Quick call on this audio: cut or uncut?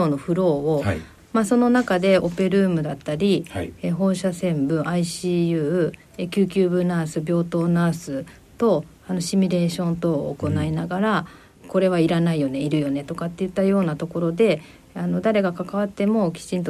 cut